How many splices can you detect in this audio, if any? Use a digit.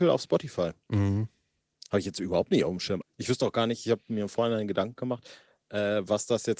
1